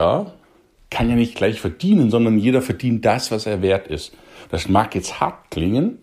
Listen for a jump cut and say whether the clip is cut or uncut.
uncut